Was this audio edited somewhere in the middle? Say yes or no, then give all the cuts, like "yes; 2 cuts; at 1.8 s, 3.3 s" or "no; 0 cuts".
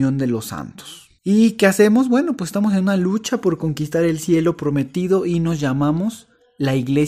yes; 1 cut; at 1.2 s